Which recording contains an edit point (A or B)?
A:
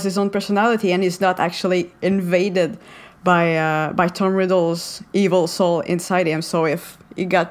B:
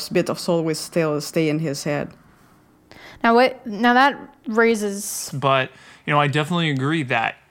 B